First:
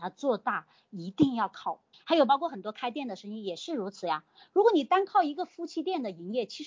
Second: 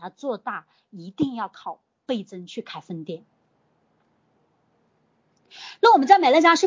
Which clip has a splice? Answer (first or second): first